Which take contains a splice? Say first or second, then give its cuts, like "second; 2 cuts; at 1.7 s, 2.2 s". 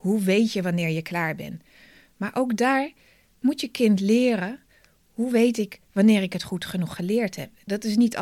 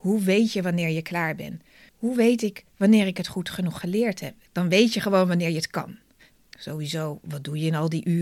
second; 3 cuts; at 1.9 s, 4.5 s, 6.3 s